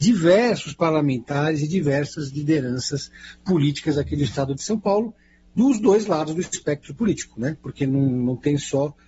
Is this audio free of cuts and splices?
yes; 0 cuts

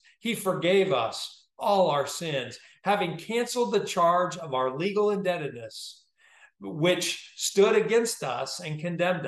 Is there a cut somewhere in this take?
no; 0 cuts

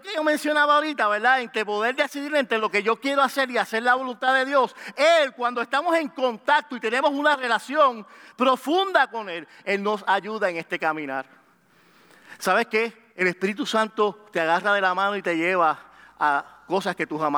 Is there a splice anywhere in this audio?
no; 0 cuts

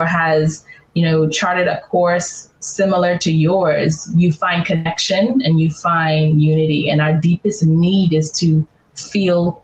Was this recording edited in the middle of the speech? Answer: no; 0 cuts

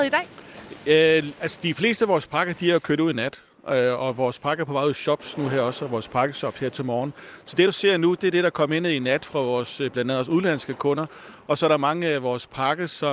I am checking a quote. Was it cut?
no; 0 cuts

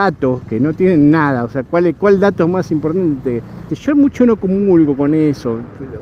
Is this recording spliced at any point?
yes; 1 cut; at 3.7 s

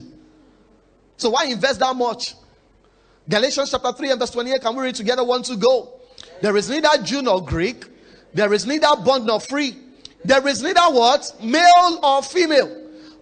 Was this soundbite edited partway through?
no; 0 cuts

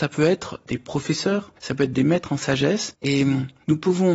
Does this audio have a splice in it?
no; 0 cuts

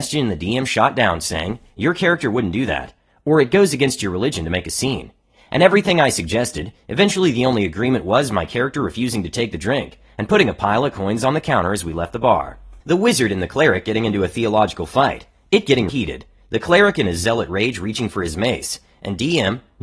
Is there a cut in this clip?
yes; 2 cuts; at 12.8 s, 15.9 s

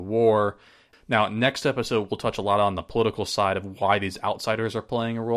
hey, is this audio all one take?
no; 1 cut; at 0.9 s

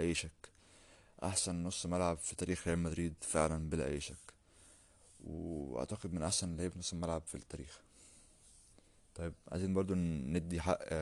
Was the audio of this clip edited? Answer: no; 0 cuts

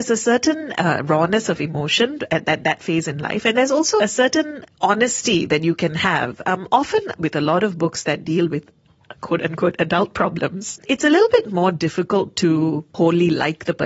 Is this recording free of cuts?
no; 1 cut; at 4.0 s

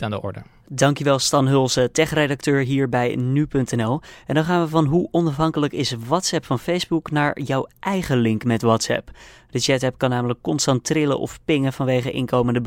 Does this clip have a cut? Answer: no; 0 cuts

